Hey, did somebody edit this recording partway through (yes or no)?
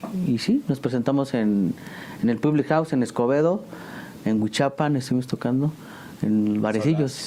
no